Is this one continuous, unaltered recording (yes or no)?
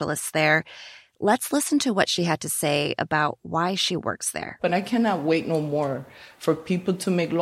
yes